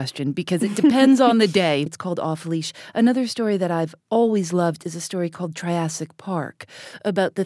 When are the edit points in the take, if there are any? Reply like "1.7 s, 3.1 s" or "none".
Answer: 1.9 s, 4.0 s